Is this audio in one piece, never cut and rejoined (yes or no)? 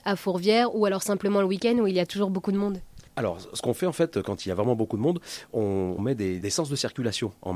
no